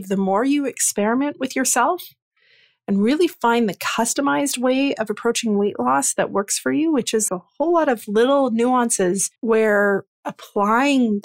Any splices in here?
yes; 2 cuts; at 7.3 s, 9.4 s

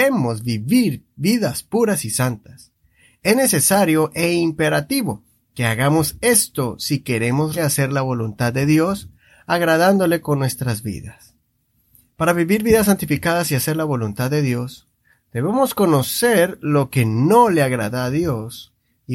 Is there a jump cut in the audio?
yes; 1 cut; at 7.6 s

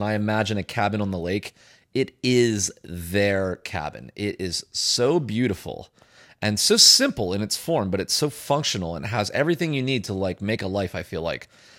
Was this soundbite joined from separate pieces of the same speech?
no; 0 cuts

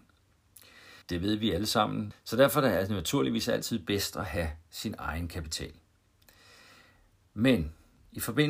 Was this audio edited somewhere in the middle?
yes; 2 cuts; at 1.0 s, 2.1 s

